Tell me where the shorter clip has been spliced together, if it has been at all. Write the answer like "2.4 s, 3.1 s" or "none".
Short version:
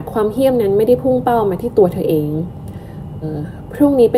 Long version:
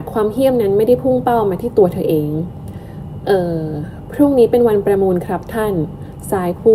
3.2 s